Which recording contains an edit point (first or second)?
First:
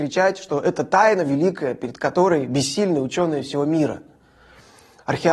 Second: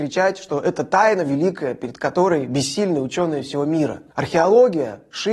second